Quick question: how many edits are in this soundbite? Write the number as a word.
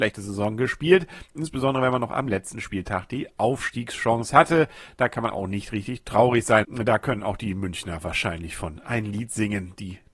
two